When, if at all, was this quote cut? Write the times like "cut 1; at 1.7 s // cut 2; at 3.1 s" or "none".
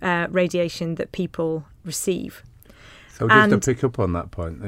none